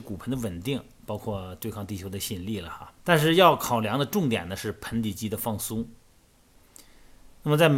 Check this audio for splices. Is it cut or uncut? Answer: cut